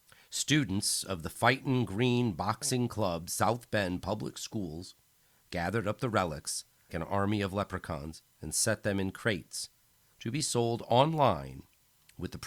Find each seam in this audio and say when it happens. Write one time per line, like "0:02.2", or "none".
0:06.9